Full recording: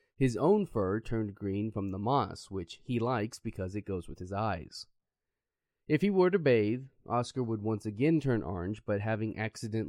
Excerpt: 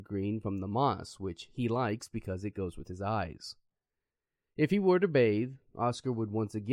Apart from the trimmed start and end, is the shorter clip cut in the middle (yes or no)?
no